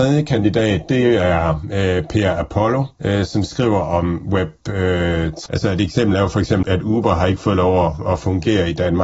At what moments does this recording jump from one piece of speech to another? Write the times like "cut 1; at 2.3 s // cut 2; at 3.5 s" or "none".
cut 1; at 2.9 s // cut 2; at 5.5 s // cut 3; at 6.6 s